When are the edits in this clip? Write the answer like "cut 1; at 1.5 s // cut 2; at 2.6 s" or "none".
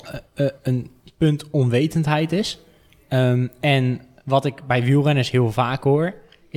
none

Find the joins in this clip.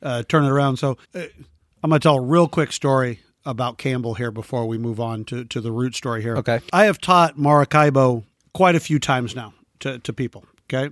cut 1; at 1.0 s

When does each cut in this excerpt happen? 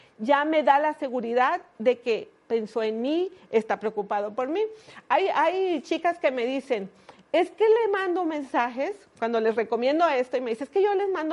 none

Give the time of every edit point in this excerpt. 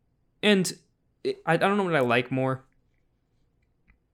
cut 1; at 1.4 s

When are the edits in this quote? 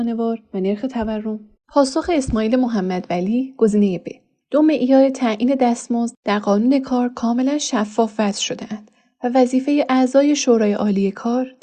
cut 1; at 1.6 s

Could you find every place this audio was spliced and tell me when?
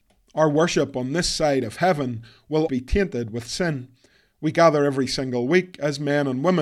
cut 1; at 2.7 s

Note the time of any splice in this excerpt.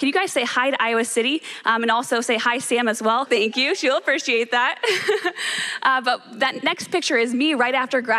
cut 1; at 3.3 s

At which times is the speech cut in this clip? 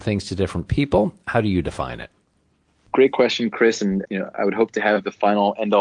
cut 1; at 4.0 s

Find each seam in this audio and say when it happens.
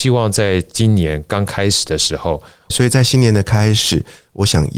cut 1; at 2.7 s

